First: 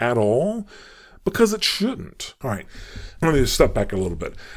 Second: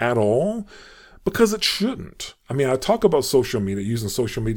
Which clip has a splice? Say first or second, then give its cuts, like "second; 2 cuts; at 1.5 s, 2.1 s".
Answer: first; 1 cut; at 2.4 s